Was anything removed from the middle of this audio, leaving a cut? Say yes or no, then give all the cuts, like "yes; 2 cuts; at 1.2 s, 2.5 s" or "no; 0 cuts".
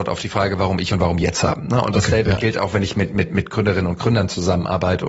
no; 0 cuts